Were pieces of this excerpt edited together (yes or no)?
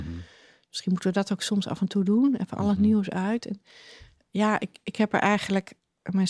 no